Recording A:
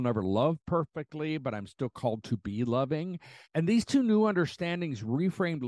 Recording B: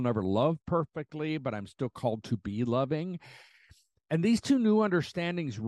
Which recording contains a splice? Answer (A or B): A